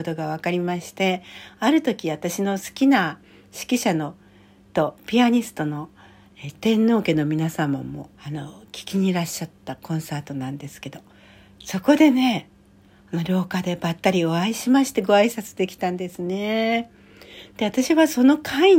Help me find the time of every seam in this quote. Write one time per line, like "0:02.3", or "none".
0:06.5
0:08.1